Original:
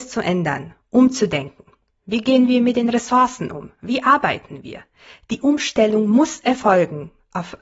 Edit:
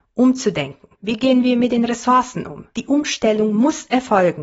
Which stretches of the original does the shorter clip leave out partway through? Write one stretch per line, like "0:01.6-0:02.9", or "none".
0:01.7-0:02.0
0:03.7-0:05.2